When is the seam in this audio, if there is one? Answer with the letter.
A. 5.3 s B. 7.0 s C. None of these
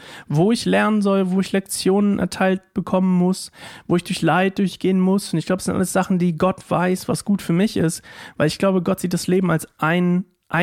C